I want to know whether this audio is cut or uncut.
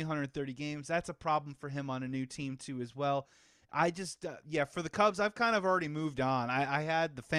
uncut